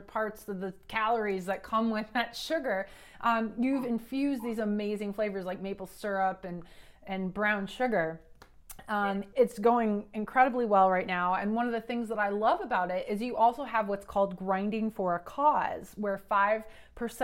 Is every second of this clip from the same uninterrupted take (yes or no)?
no